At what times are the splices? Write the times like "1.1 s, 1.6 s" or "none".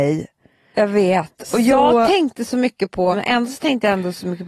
3.1 s